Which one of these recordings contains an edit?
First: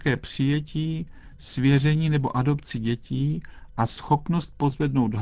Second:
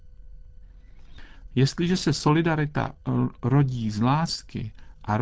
second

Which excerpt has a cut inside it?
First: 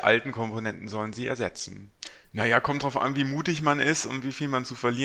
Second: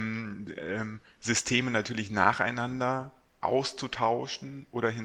first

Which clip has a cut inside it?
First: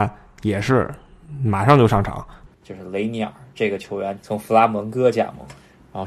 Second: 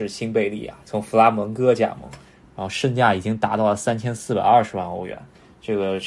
first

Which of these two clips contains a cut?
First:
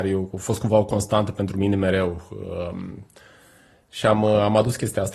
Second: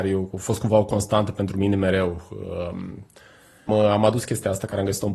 second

